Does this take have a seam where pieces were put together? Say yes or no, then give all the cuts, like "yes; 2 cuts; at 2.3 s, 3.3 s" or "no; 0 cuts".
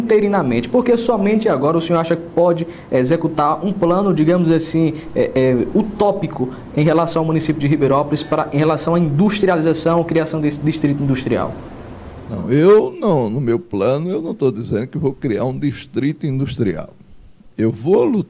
no; 0 cuts